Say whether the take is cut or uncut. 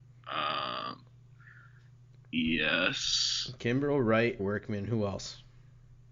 cut